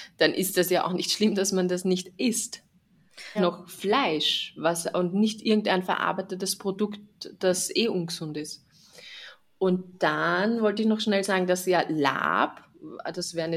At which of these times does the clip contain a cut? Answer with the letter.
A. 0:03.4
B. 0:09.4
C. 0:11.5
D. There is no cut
A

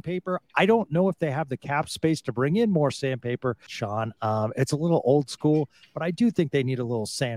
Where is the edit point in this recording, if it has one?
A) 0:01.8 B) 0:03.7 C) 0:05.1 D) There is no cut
B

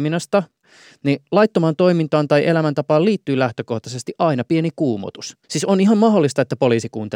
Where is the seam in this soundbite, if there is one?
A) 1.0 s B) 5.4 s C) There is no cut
B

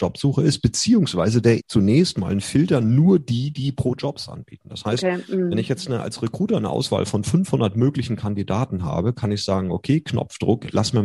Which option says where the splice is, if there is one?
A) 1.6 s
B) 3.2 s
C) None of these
A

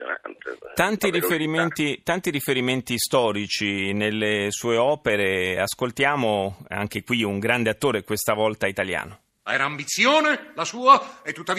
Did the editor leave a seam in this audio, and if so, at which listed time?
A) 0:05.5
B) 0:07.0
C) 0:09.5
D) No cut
C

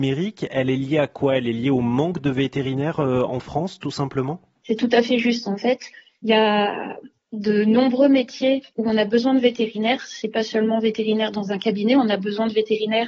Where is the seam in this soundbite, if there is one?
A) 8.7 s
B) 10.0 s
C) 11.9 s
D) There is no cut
A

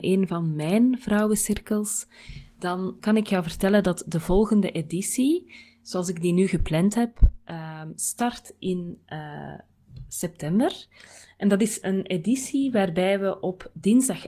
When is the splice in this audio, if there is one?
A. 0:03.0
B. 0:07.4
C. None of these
A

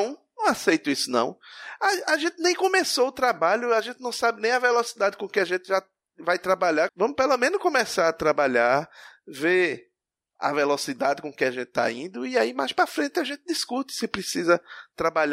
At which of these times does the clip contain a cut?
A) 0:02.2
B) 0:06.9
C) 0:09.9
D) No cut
B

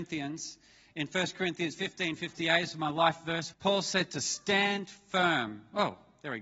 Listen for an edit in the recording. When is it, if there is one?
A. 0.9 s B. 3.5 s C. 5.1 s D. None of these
B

